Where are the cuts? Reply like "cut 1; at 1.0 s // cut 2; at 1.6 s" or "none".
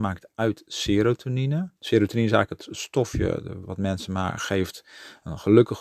cut 1; at 1.8 s // cut 2; at 3.6 s